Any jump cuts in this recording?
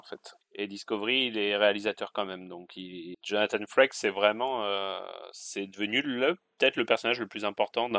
no; 0 cuts

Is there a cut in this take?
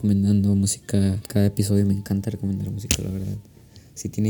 no; 0 cuts

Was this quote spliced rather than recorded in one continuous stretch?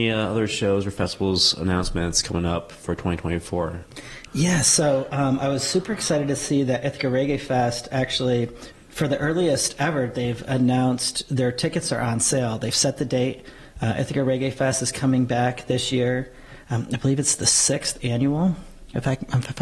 no; 0 cuts

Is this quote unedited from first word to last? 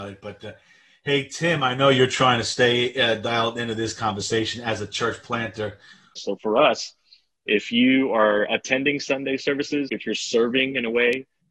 no; 2 cuts; at 6.2 s, 9.9 s

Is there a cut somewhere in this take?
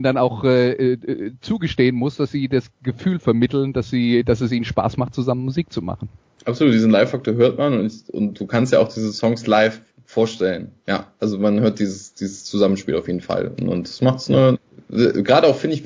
no; 0 cuts

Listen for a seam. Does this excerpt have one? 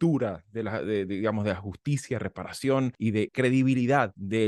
yes; 1 cut; at 3.3 s

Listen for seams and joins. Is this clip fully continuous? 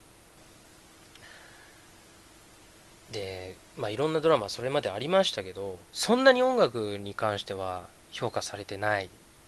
no; 1 cut; at 5.9 s

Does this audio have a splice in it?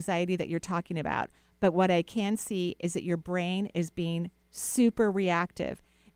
no; 0 cuts

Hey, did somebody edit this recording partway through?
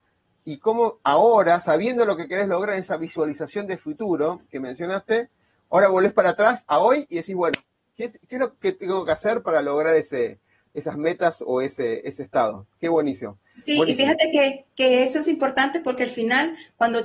no; 0 cuts

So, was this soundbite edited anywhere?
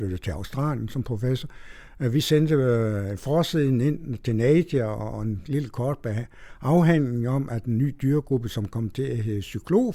no; 0 cuts

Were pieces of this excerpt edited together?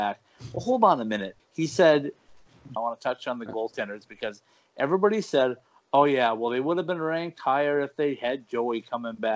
yes; 2 cuts; at 1.4 s, 2.8 s

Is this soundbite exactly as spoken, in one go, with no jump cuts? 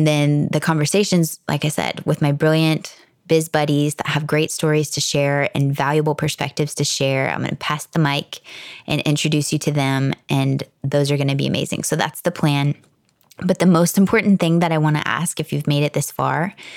yes; 0 cuts

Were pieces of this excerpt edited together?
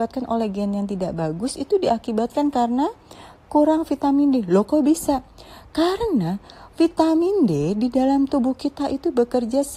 no; 0 cuts

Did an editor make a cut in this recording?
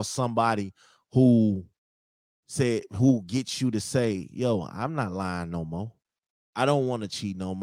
no; 0 cuts

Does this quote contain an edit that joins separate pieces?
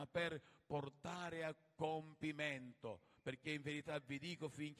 no; 0 cuts

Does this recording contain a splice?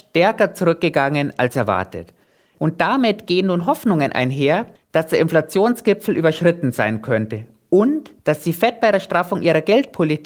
yes; 2 cuts; at 2.5 s, 8.2 s

